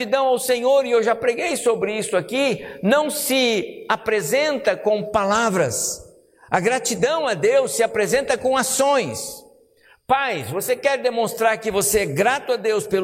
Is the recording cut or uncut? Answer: uncut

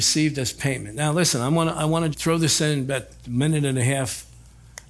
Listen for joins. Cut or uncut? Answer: cut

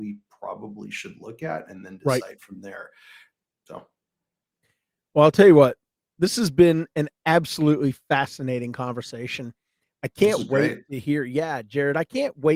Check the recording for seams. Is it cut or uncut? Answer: uncut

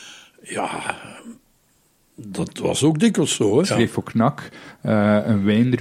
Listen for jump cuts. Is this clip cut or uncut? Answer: cut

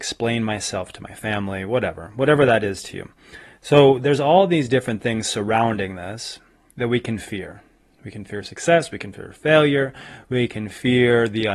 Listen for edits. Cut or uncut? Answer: uncut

